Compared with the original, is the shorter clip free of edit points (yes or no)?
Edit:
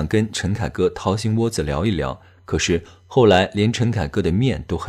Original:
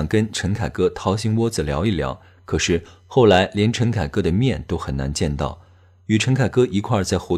yes